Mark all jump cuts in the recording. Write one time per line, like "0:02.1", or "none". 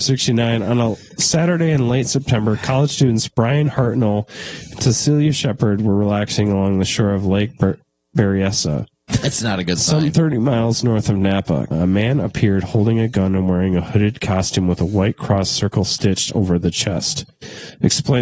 0:11.7